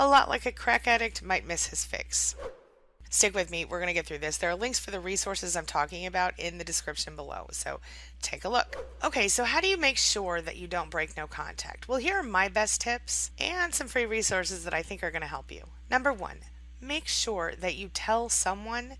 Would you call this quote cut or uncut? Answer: cut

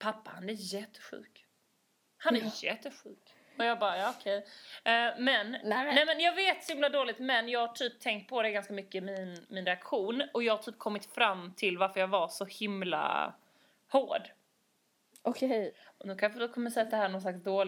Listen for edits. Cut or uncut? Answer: uncut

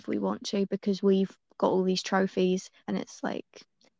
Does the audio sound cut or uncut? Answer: cut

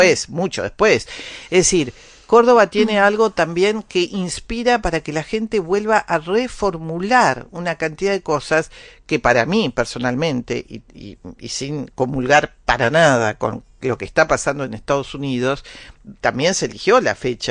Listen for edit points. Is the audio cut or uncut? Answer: uncut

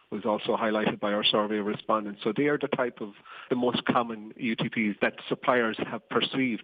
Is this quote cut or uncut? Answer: cut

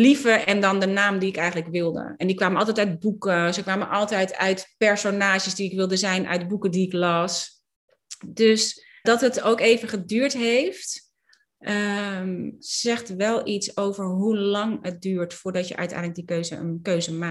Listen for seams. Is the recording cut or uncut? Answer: cut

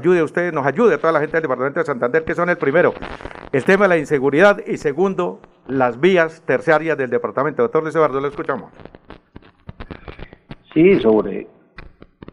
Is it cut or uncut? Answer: uncut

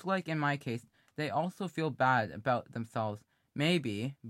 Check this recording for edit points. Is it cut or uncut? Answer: uncut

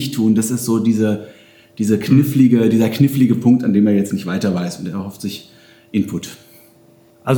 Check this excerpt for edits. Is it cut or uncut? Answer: uncut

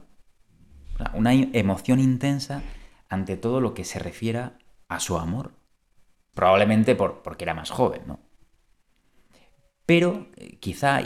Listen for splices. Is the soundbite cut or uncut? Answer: cut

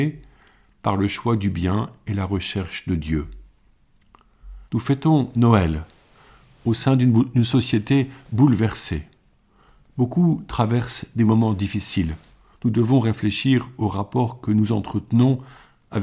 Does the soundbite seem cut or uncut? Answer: cut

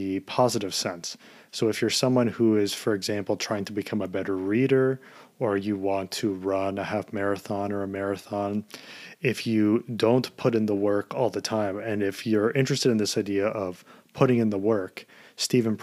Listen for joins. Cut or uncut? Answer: uncut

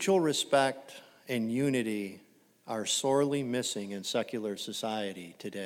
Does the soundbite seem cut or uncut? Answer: uncut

